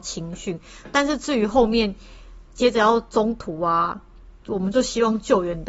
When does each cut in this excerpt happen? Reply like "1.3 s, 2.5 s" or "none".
2.5 s, 4.4 s